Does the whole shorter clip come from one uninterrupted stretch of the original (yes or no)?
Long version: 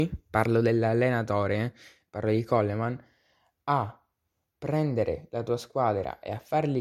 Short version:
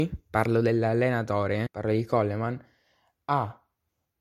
no